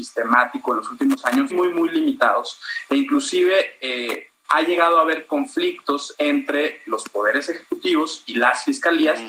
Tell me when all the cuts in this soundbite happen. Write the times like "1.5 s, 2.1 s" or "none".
1.5 s, 4.4 s